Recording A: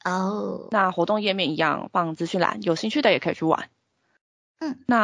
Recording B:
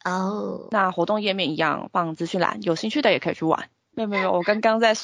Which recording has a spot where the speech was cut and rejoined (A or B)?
B